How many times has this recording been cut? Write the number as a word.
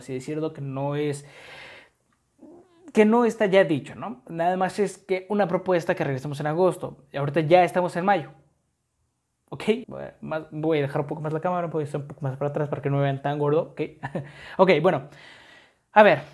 one